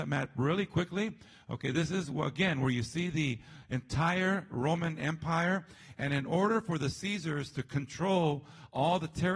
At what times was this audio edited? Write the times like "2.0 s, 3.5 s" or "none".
none